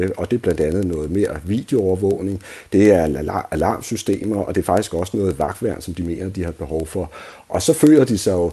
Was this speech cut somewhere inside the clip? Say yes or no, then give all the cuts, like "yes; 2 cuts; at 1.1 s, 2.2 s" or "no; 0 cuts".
no; 0 cuts